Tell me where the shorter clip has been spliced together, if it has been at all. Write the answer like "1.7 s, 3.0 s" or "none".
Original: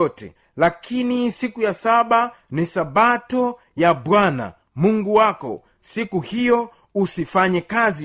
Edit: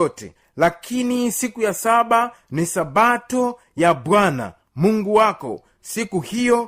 none